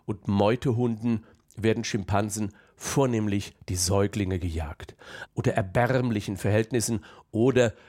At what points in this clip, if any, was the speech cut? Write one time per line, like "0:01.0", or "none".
0:05.3